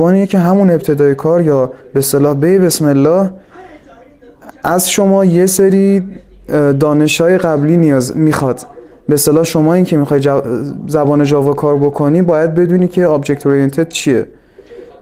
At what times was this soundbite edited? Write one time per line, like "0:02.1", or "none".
none